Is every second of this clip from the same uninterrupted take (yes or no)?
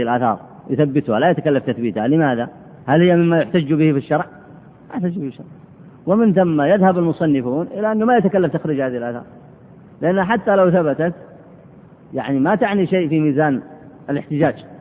no